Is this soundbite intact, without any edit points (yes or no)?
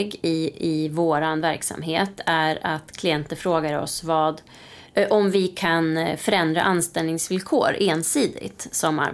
yes